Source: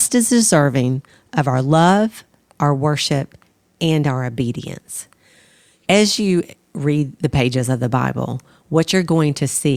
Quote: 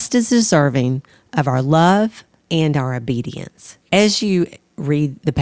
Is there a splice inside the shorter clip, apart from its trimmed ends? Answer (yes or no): yes